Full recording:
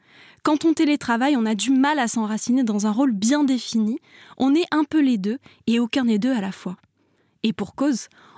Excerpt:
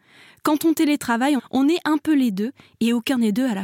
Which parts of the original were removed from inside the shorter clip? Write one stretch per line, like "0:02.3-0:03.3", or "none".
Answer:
0:01.4-0:04.2